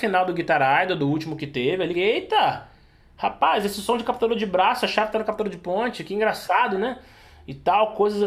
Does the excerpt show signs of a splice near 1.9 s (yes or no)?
yes